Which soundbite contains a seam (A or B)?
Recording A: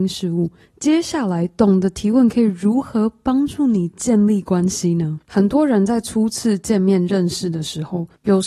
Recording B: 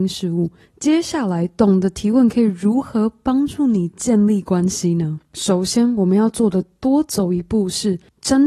A